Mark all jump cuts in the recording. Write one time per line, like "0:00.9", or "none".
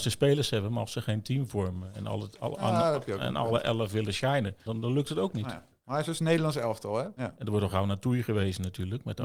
0:04.7
0:07.2